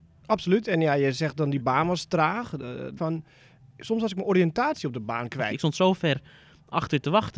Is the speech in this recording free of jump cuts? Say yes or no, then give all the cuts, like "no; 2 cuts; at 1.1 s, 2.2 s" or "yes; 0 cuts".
no; 2 cuts; at 3.0 s, 5.5 s